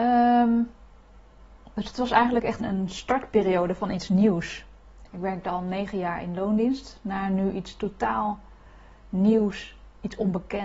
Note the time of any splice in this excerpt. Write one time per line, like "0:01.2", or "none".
0:02.6
0:05.1